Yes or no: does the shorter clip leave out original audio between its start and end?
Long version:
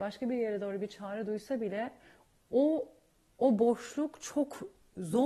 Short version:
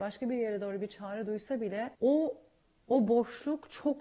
yes